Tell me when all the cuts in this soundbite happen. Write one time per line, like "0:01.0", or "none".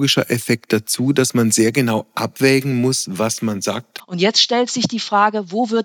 0:04.0

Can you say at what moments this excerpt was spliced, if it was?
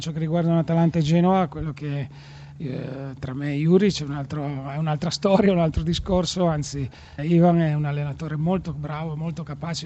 0:07.2

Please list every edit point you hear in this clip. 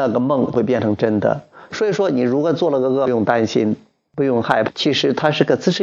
0:01.7

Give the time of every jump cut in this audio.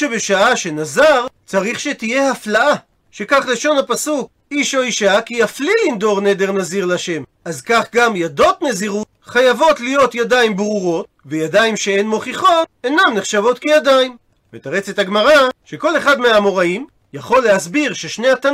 0:07.3
0:14.4

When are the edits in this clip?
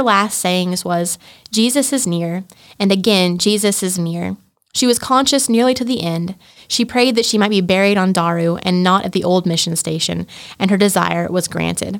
0:04.0

